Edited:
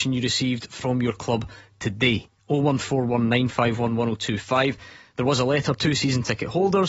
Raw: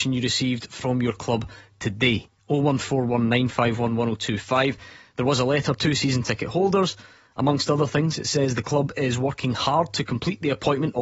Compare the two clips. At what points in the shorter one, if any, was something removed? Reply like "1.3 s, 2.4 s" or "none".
none